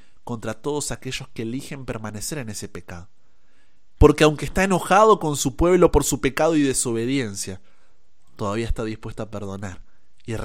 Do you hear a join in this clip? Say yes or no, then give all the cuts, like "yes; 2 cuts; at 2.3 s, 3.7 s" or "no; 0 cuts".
yes; 1 cut; at 4.0 s